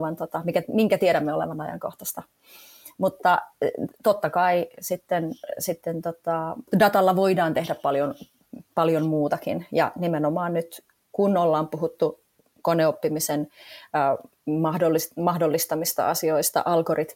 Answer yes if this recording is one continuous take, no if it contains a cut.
yes